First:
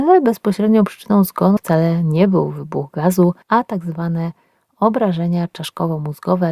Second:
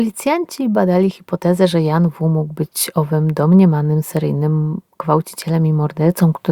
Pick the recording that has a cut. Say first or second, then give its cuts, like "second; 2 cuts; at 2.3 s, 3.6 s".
first; 2 cuts; at 1.6 s, 3.4 s